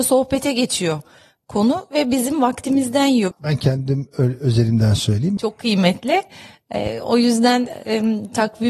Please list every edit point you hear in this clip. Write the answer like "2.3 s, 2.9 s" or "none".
3.3 s, 5.4 s